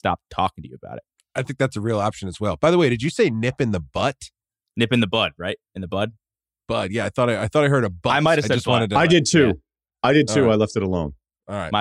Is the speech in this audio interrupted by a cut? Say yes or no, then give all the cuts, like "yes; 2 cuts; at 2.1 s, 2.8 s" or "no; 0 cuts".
no; 0 cuts